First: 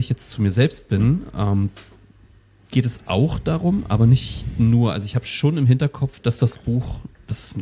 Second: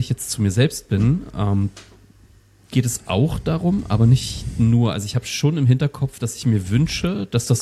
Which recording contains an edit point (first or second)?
first